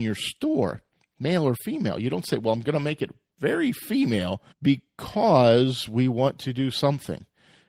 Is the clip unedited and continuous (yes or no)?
no